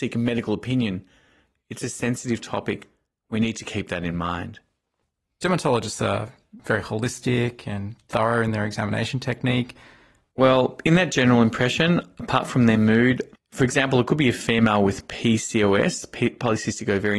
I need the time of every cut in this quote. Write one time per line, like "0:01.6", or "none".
0:10.3
0:13.4